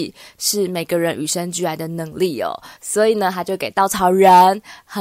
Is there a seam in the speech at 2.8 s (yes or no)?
yes